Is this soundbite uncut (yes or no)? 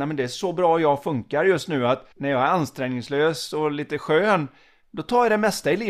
no